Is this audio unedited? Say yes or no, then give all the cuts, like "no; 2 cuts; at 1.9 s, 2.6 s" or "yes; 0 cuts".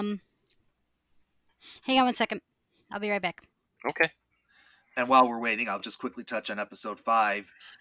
yes; 0 cuts